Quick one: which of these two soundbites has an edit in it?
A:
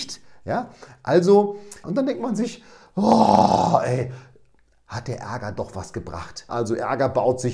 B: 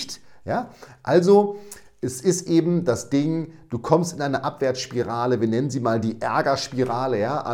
A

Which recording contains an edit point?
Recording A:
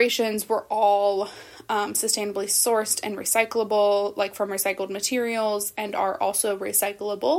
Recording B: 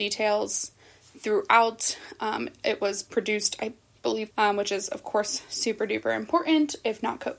B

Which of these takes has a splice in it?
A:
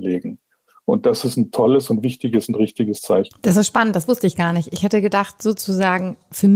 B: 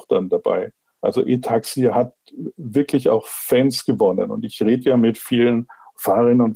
A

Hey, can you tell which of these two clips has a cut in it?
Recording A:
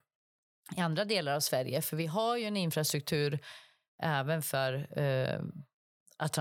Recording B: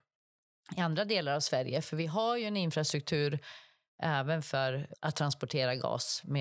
B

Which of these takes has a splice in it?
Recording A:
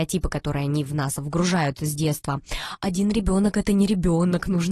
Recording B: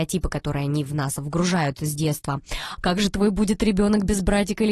B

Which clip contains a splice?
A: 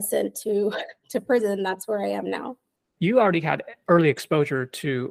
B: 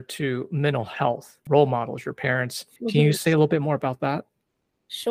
B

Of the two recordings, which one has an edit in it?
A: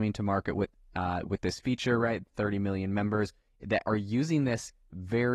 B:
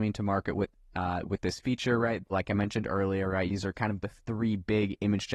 B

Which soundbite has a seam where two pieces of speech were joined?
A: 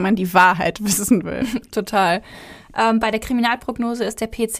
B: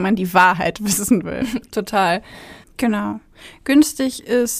B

